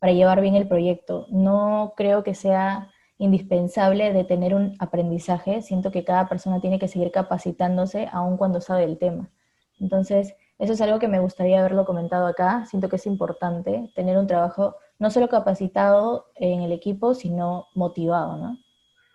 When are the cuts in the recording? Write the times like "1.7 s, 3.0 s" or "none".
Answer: none